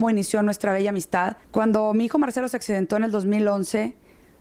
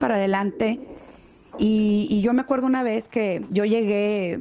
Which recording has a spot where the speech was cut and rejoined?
first; 1 cut; at 1.4 s

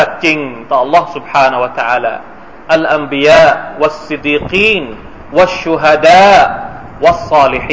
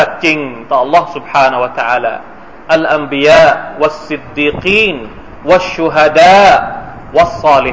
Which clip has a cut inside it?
first; 1 cut; at 4.2 s

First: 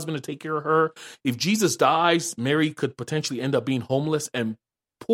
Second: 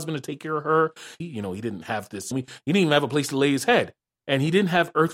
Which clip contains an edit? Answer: second; 2 cuts; at 1.2 s, 2.3 s

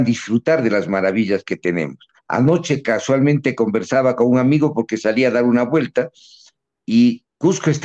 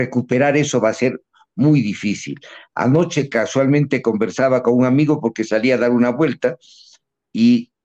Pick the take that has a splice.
first; 1 cut; at 2.2 s

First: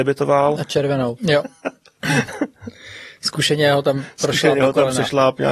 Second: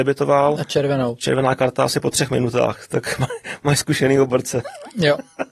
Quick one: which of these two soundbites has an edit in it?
first; 1 cut; at 1.2 s

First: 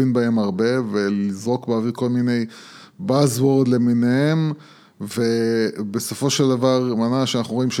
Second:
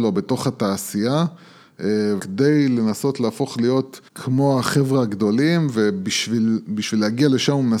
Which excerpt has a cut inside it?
second; 2 cuts; at 2.2 s, 4.1 s

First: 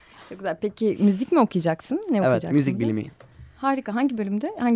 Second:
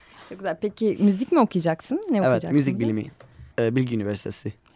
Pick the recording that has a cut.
second; 1 cut; at 3.5 s

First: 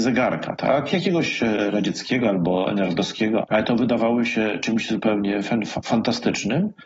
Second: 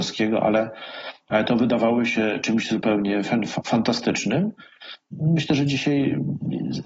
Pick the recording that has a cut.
first; 1 cut; at 3.4 s

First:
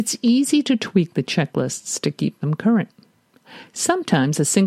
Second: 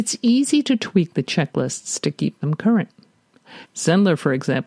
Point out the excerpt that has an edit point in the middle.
second; 1 cut; at 3.6 s

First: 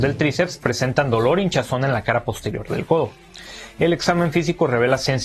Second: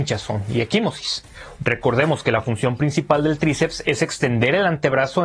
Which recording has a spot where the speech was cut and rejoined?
second; 1 cut; at 1.6 s

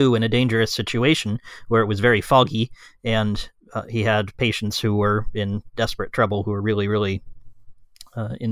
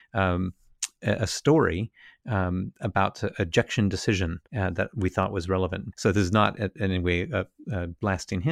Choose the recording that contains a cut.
second; 2 cuts; at 4.5 s, 5.9 s

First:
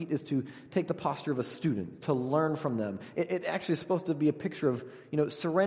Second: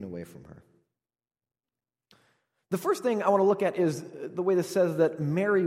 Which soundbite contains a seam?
first; 1 cut; at 2.0 s

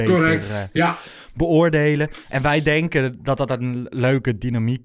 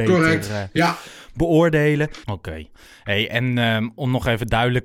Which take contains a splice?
second; 1 cut; at 2.2 s

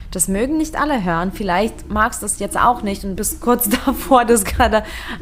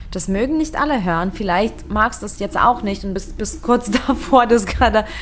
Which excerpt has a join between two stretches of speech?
first; 1 cut; at 3.2 s

